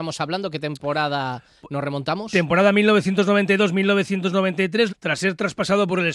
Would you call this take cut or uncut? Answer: cut